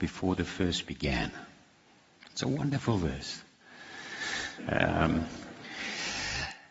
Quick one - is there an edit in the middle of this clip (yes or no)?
yes